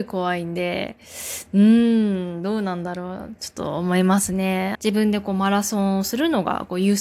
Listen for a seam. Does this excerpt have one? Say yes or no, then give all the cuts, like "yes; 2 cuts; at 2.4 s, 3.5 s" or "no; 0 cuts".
yes; 1 cut; at 4.7 s